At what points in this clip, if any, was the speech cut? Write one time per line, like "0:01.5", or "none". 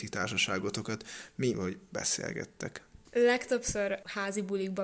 0:01.5